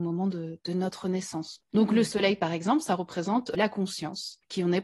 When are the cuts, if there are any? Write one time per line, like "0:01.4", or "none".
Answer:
0:01.6